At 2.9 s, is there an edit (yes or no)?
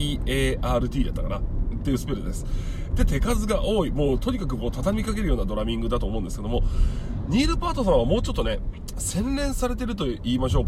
yes